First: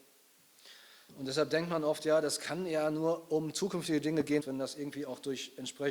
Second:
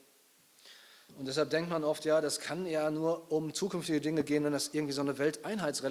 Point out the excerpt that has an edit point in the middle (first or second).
first